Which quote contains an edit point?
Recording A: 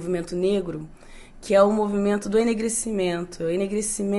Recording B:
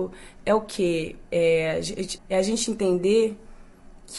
B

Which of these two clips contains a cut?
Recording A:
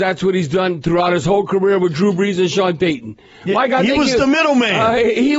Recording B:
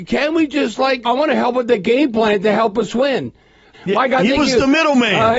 B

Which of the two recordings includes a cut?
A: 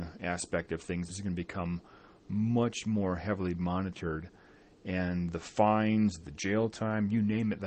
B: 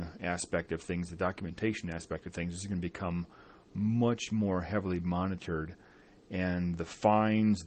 A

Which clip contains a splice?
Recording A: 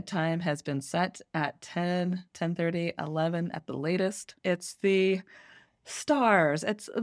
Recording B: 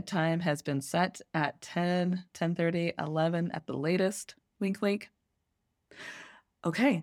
A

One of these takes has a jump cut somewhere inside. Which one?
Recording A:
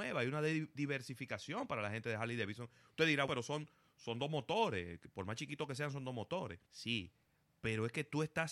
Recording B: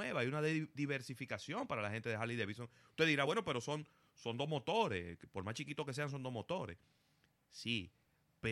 A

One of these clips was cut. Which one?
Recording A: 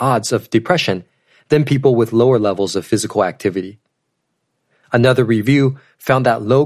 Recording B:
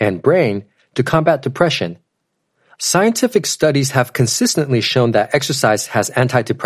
B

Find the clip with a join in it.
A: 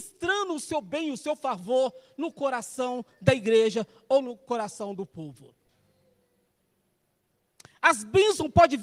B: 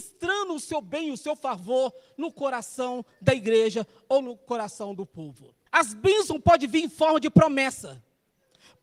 B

